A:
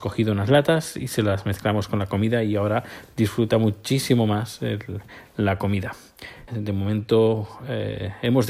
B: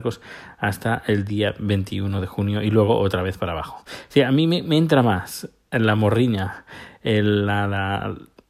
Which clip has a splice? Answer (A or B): A